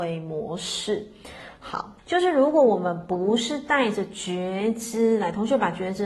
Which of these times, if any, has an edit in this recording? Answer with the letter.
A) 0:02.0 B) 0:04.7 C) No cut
A